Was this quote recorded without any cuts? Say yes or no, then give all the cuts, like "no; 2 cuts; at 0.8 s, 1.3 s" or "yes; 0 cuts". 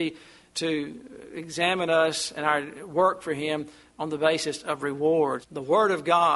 no; 1 cut; at 5.4 s